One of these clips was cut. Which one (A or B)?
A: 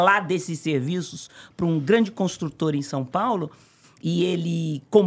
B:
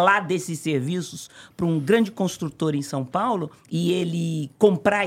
B